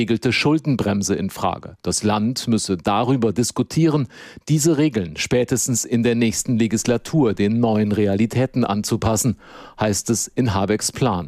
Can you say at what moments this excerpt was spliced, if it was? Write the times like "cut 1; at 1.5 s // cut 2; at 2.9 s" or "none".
none